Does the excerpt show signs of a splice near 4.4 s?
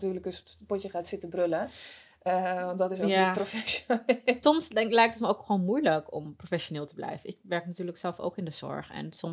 yes; 1 cut; at 4.4 s

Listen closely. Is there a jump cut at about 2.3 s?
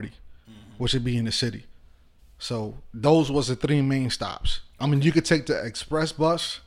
no; 0 cuts

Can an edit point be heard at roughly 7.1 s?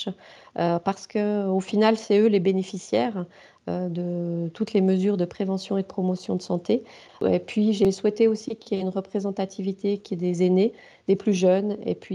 yes; 1 cut; at 7.1 s

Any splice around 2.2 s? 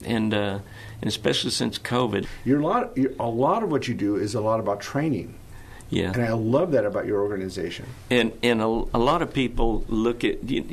yes; 1 cut; at 2.2 s

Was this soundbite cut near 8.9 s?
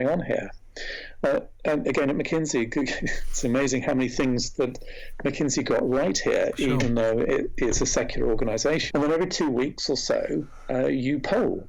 yes; 1 cut; at 8.9 s

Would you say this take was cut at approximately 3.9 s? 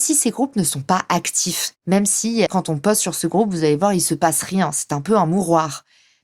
no; 1 cut; at 2.5 s

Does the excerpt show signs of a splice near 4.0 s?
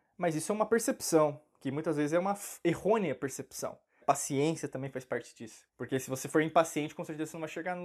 yes; 2 cuts; at 4.0 s, 5.7 s

